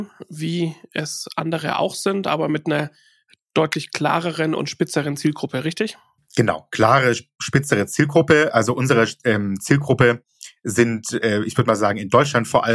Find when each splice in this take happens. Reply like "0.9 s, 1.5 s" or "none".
none

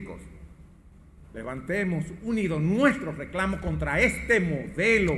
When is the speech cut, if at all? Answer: 1.2 s

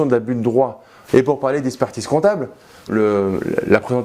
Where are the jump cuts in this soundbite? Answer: 1.1 s, 2.9 s

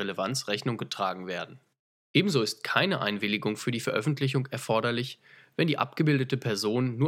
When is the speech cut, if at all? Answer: none

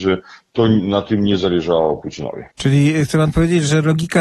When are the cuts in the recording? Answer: 2.5 s

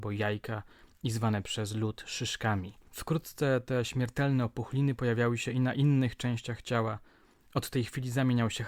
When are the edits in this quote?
none

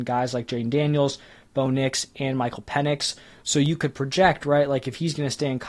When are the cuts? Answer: none

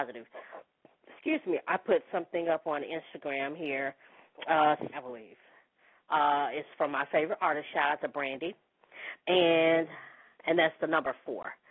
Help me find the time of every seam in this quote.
4.9 s, 9.2 s

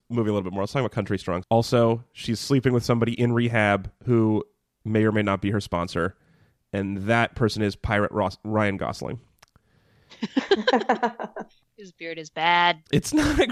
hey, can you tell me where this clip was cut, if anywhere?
1.4 s

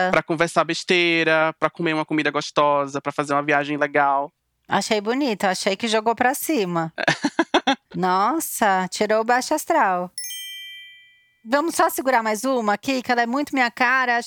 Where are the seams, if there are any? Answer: 13.0 s

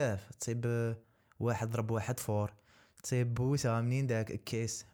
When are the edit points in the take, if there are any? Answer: none

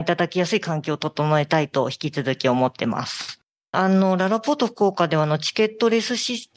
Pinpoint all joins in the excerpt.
3.7 s

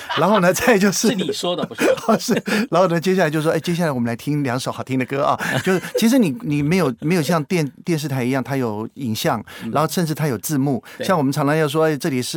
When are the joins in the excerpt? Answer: none

